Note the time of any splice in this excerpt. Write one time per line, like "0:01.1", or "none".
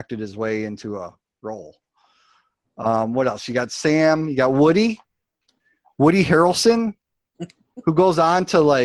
none